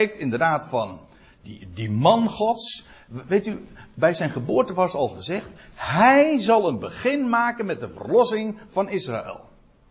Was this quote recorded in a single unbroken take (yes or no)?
yes